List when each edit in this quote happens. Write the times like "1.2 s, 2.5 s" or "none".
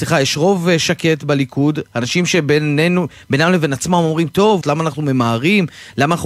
4.6 s